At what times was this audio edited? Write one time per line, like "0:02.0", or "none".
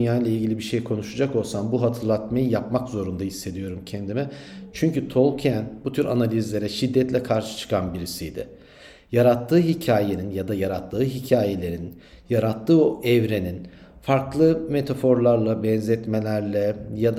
none